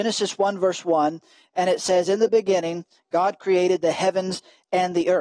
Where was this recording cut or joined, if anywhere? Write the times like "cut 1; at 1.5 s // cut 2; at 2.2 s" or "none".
none